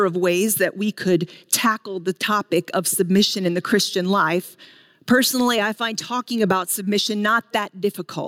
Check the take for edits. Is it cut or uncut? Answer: uncut